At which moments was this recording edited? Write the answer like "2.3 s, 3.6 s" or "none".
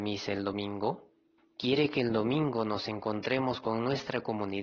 1.4 s